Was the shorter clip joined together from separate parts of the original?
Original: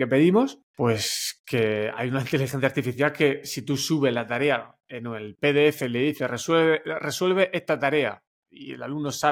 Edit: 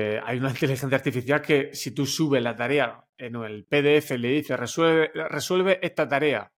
no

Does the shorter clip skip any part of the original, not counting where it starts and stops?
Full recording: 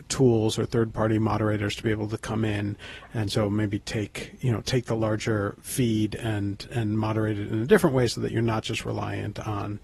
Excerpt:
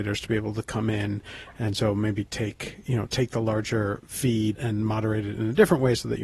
yes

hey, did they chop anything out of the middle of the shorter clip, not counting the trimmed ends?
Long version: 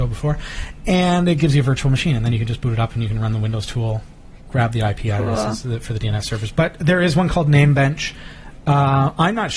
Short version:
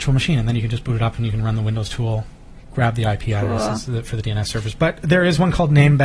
no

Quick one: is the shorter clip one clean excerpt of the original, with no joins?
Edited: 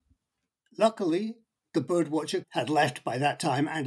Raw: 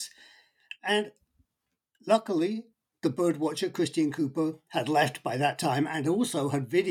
no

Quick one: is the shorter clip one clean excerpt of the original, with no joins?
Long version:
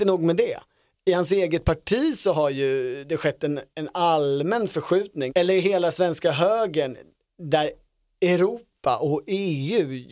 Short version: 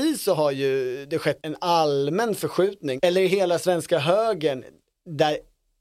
no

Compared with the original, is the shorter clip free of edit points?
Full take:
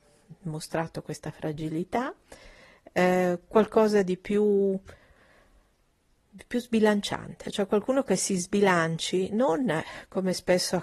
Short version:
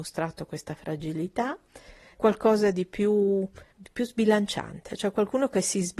no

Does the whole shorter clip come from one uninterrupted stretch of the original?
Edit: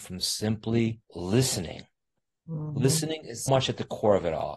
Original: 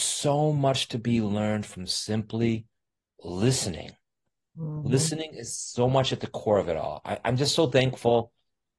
no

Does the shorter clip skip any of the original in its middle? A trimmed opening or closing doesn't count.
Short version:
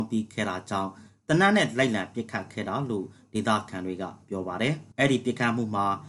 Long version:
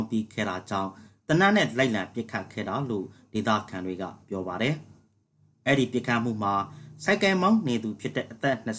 yes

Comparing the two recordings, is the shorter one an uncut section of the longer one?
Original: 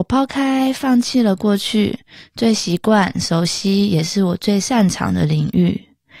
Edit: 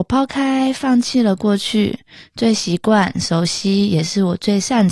yes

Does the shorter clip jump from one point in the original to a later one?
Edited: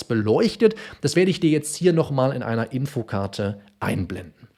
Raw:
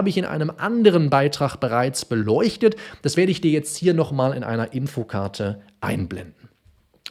no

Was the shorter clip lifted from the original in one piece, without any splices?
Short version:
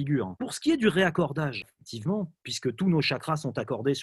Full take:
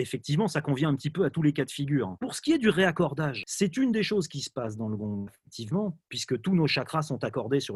no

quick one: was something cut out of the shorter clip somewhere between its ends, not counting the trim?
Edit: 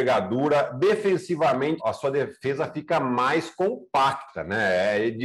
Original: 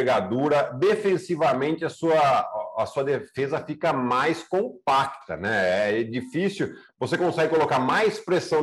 yes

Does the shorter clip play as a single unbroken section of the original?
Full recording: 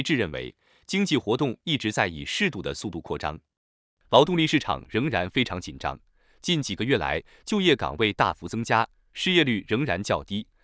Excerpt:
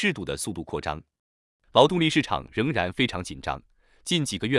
yes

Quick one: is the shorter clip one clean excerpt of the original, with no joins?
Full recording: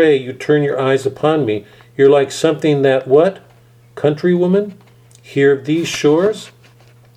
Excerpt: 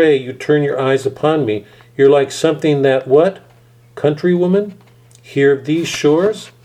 yes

